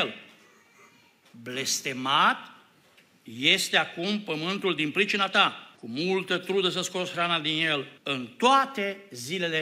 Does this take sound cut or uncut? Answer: cut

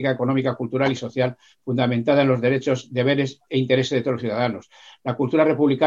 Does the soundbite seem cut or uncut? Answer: uncut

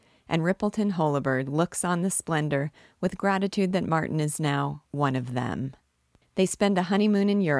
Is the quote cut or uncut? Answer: cut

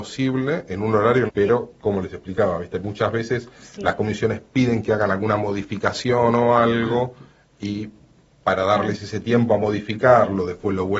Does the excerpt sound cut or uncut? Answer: cut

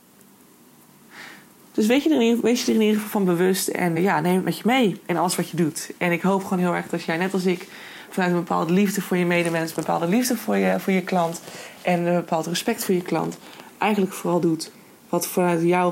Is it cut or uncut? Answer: cut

